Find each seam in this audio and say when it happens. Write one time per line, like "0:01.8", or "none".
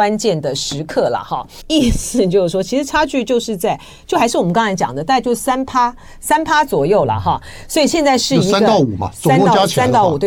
0:01.6